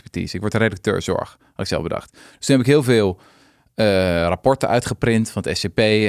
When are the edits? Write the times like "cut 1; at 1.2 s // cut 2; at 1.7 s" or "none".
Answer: none